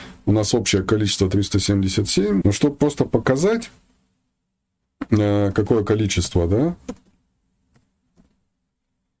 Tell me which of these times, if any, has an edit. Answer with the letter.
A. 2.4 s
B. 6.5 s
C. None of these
A